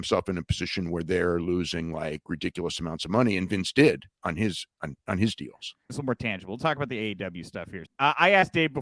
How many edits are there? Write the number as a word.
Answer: two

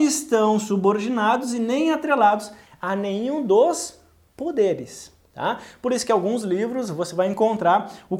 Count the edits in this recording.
zero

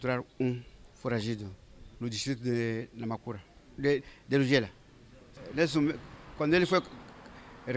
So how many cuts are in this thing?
two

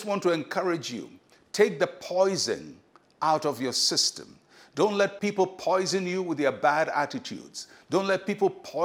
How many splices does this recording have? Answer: zero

